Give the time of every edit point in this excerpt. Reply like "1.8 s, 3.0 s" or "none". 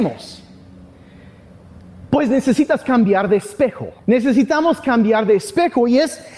4.0 s

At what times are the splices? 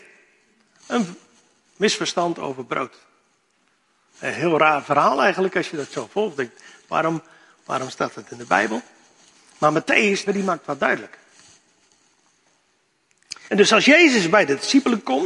10.3 s, 13.5 s

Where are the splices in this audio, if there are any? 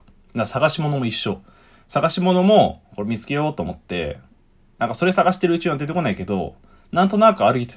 none

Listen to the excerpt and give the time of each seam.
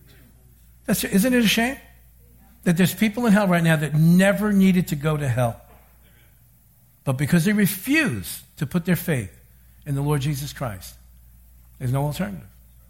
none

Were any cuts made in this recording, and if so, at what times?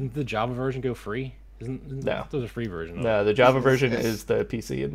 none

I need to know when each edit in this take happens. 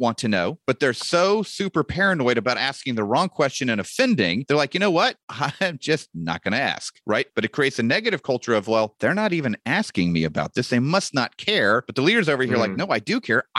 7.3 s

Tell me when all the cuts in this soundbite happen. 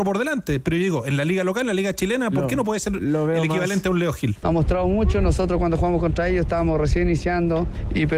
4.4 s

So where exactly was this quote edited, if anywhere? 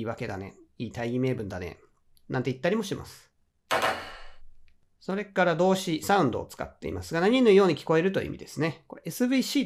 none

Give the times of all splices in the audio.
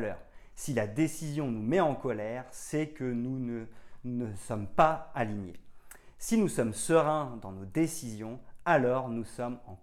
none

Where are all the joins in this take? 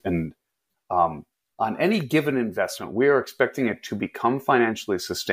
none

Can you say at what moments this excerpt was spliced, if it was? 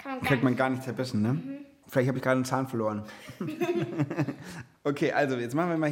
none

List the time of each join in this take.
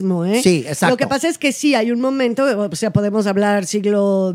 none

